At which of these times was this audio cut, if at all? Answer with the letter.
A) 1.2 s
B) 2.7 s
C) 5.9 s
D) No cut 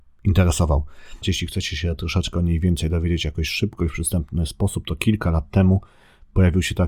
A